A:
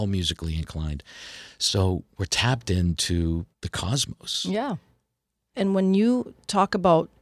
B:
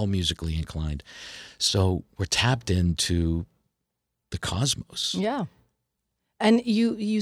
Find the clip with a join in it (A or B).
A